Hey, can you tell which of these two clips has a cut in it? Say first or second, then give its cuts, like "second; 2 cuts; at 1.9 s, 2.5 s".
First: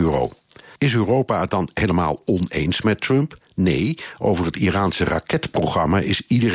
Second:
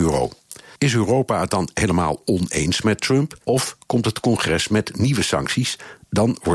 second; 1 cut; at 3.4 s